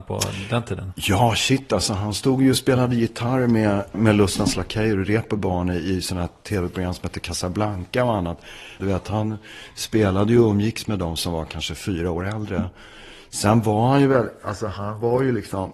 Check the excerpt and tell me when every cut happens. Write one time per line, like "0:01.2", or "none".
0:03.9
0:08.8